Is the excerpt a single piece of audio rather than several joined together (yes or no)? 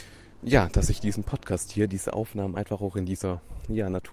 yes